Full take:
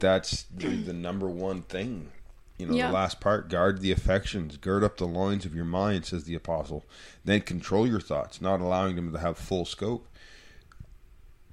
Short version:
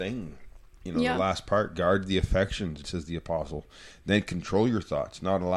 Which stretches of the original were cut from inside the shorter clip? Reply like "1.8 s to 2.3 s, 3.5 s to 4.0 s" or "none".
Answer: 4.6 s to 6.0 s